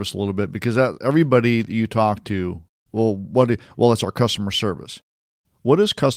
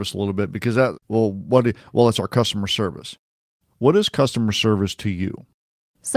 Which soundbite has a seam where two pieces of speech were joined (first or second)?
second